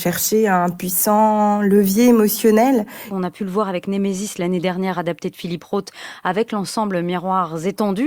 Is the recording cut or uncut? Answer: cut